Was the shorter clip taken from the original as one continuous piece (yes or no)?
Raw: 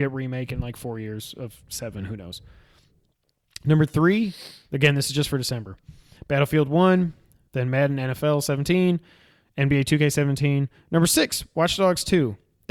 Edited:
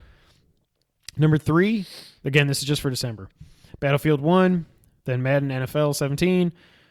yes